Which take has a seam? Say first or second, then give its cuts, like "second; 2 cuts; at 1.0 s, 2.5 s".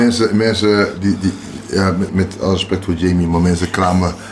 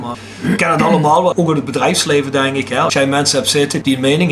first; 1 cut; at 2.1 s